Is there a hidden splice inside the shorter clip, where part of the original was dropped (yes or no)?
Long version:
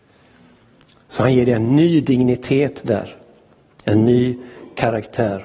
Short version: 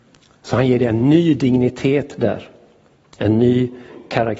no